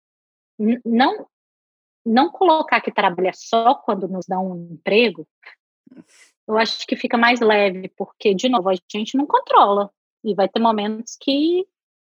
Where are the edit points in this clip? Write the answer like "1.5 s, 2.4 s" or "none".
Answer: none